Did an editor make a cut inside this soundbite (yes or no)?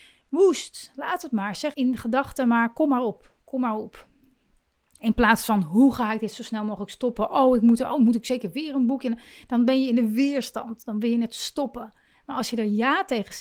yes